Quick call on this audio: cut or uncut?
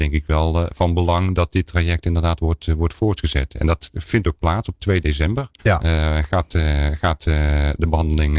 cut